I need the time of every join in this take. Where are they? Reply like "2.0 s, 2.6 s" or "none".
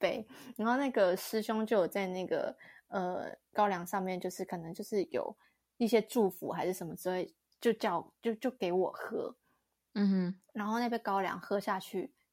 none